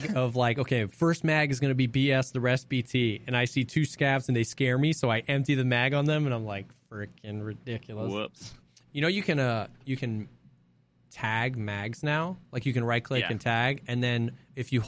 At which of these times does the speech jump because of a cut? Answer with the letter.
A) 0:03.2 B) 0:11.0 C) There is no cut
C